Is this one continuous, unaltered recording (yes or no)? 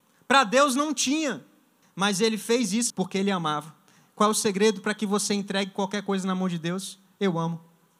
no